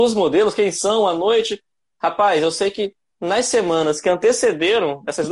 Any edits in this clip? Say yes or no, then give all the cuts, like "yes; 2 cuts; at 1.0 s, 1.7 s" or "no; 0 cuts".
no; 0 cuts